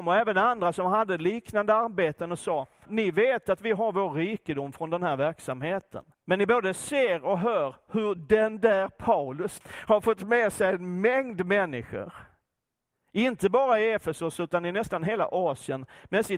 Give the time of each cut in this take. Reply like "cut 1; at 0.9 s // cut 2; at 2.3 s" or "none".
cut 1; at 2.9 s // cut 2; at 6.1 s // cut 3; at 9.6 s